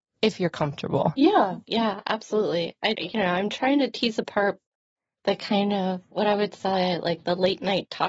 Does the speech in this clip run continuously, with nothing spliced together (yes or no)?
no